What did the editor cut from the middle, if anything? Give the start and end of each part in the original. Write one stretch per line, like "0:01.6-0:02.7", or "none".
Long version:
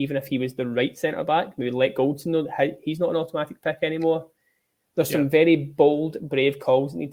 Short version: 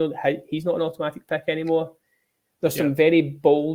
none